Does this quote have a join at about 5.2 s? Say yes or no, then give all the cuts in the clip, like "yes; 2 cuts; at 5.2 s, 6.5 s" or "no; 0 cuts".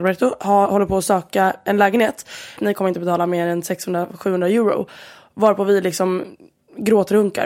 no; 1 cut; at 2.6 s